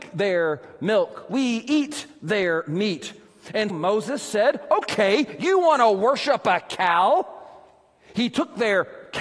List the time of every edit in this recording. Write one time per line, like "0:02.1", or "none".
0:03.7